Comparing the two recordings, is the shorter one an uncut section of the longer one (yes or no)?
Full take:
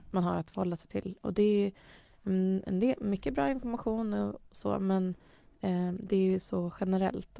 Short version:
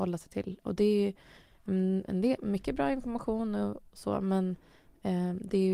yes